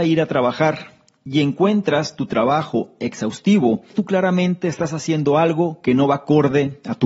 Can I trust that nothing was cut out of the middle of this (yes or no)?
no